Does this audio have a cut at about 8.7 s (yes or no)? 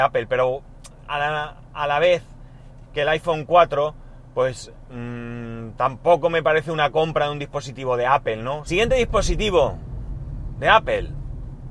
yes